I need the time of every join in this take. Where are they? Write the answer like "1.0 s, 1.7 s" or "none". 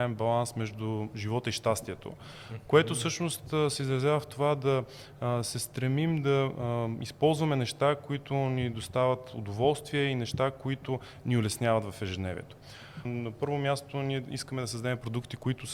13.0 s